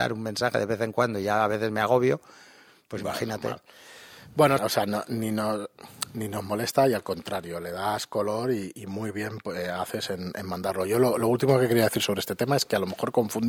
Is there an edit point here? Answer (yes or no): yes